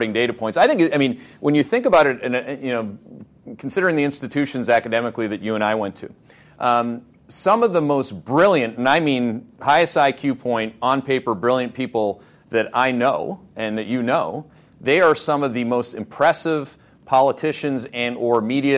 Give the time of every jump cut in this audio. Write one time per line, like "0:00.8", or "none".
none